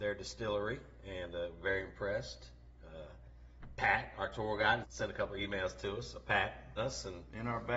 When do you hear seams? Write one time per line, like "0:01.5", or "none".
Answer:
0:04.8
0:06.8